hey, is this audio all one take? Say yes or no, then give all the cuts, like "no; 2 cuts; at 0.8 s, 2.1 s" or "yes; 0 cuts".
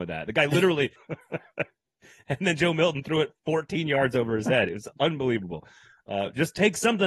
no; 1 cut; at 1.0 s